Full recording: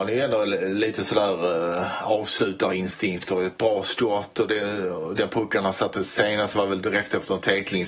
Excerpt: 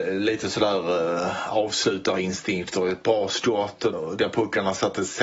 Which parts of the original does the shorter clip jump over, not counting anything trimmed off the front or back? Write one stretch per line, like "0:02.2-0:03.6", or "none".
0:04.5-0:04.9